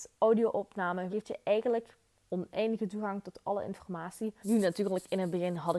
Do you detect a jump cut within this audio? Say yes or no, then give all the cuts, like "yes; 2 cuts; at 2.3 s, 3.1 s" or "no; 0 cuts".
yes; 2 cuts; at 1.1 s, 4.4 s